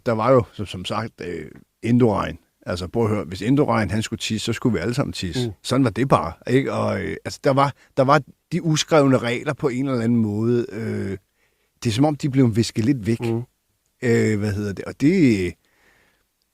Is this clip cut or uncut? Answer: uncut